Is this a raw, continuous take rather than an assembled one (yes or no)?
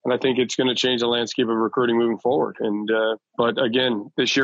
yes